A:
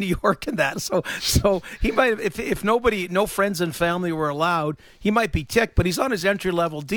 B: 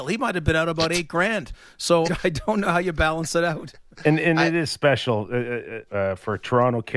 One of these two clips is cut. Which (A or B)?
B